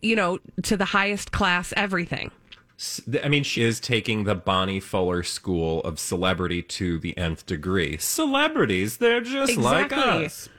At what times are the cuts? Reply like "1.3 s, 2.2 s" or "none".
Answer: 3.6 s